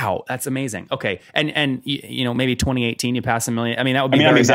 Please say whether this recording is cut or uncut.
uncut